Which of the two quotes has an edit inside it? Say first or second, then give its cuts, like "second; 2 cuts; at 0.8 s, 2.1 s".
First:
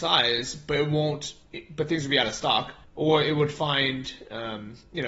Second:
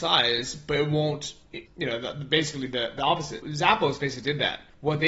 second; 2 cuts; at 1.7 s, 3.4 s